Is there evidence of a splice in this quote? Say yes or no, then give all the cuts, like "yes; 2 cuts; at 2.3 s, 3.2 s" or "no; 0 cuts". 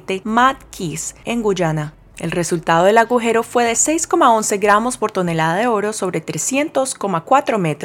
yes; 1 cut; at 1.2 s